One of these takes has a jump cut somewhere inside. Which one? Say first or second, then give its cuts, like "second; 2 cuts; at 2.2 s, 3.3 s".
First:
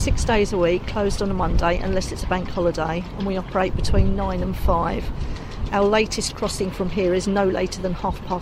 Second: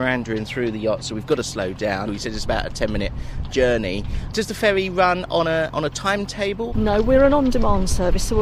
second; 3 cuts; at 2.0 s, 3.5 s, 6.7 s